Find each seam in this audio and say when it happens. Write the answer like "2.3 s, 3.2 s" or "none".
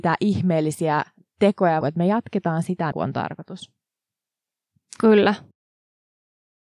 1.8 s, 2.9 s